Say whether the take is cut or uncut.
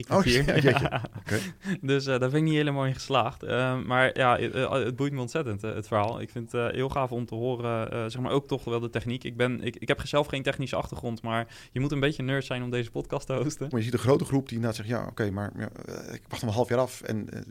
cut